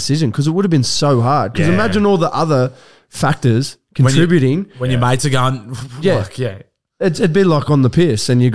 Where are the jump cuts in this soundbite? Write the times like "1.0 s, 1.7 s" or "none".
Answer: none

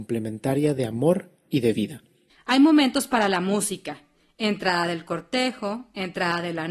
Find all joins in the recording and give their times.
2.3 s

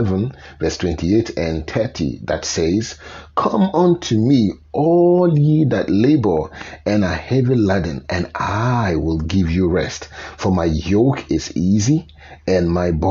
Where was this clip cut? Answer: none

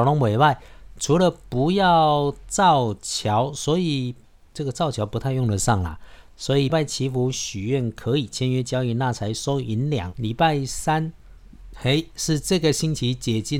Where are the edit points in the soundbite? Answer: 6.7 s, 10.1 s

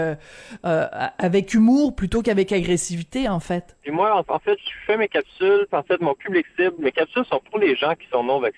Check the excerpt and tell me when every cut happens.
3.8 s, 5.7 s

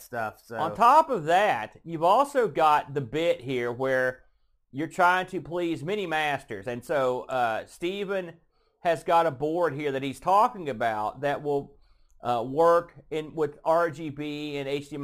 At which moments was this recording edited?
none

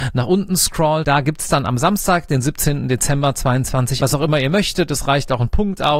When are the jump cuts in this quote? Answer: 4.0 s

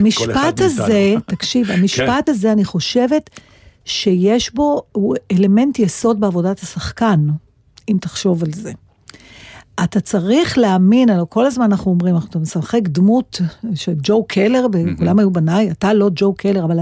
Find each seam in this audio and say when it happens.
none

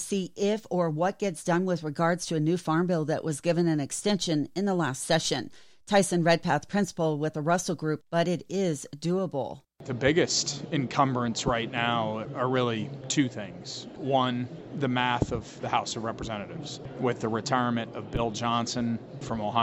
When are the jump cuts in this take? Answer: 8.0 s

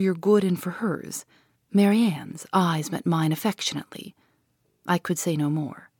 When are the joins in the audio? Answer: 1.5 s

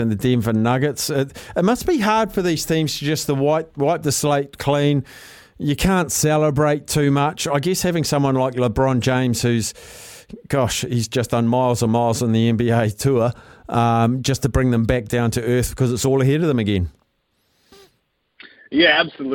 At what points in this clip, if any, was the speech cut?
none

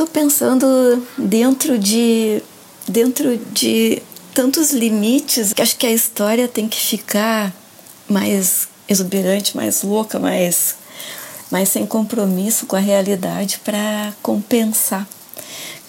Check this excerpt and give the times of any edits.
5.5 s

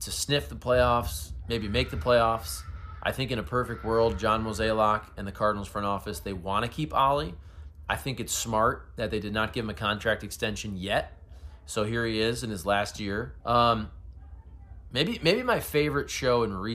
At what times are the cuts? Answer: 13.4 s, 14.9 s

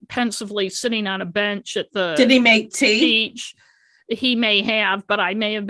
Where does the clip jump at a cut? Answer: none

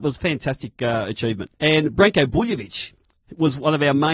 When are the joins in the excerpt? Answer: 1.5 s

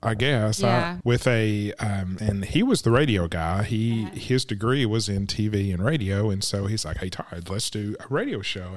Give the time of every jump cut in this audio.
1.0 s, 2.2 s

